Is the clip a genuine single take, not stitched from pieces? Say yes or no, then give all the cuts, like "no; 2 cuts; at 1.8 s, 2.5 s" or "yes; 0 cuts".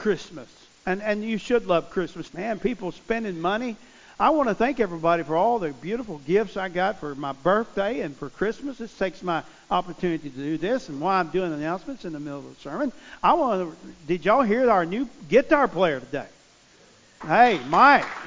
no; 1 cut; at 2.3 s